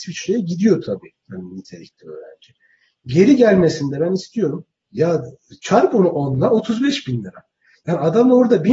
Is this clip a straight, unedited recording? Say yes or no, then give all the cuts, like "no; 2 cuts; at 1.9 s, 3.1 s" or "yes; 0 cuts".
no; 1 cut; at 4.8 s